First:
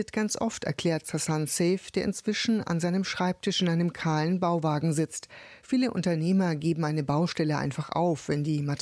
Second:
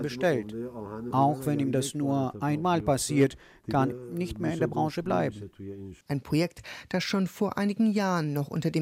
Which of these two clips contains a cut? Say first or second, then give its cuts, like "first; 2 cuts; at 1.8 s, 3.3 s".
second; 3 cuts; at 1.1 s, 3.9 s, 6.0 s